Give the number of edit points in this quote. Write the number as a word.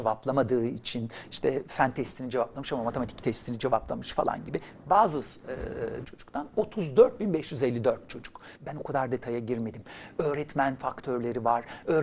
two